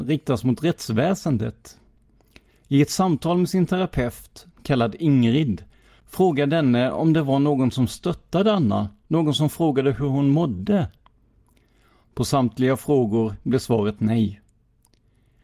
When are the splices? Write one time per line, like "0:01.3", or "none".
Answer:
none

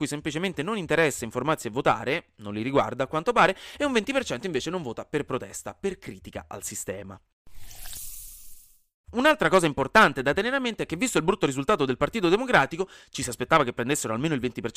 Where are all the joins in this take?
none

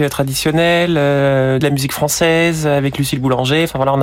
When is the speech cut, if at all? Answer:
0:01.6

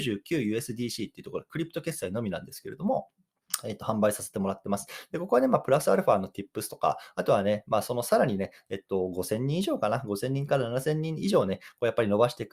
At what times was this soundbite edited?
none

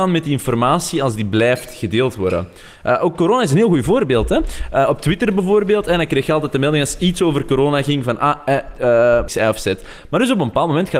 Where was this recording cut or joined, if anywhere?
0:09.3

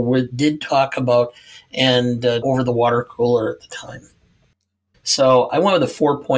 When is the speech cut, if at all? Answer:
0:02.4
0:04.9

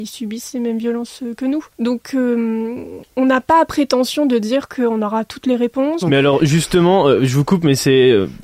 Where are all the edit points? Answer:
0:01.7
0:06.0

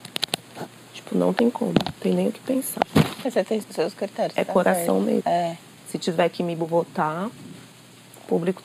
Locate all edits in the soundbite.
0:03.6
0:05.2

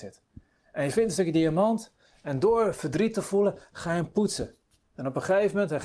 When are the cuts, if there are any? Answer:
none

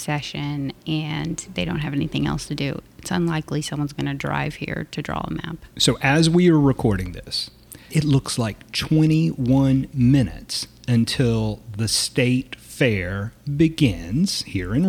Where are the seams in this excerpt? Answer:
0:07.9

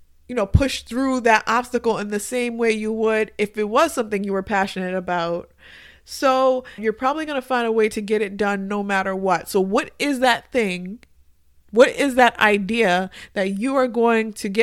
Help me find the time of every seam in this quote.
0:06.8

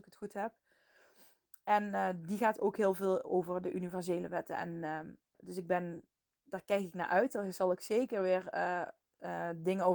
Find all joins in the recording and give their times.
0:05.3

